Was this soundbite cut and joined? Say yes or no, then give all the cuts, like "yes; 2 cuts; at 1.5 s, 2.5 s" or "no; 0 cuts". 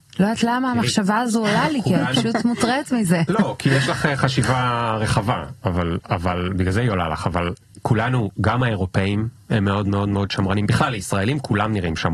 no; 0 cuts